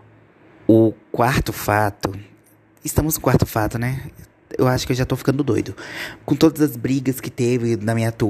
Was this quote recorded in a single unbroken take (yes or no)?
no